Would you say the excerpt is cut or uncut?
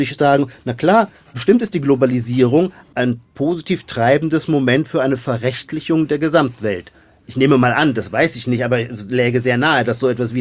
uncut